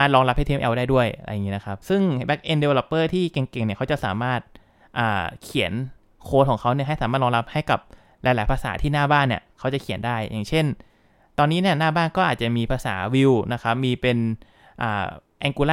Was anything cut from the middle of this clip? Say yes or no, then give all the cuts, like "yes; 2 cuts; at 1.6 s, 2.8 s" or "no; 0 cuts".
yes; 1 cut; at 1.8 s